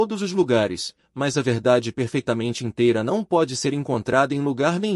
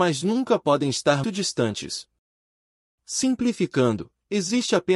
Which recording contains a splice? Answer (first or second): second